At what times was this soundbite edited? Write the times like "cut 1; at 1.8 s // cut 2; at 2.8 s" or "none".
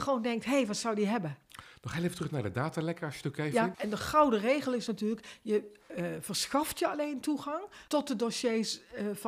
cut 1; at 3.7 s // cut 2; at 7.9 s